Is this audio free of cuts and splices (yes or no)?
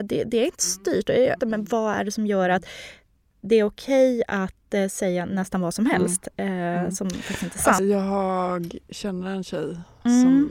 no